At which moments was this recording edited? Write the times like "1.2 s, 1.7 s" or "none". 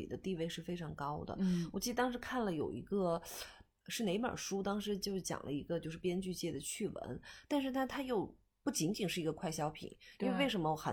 7.4 s